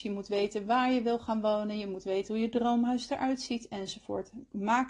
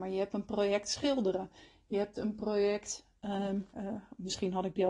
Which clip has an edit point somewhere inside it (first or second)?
second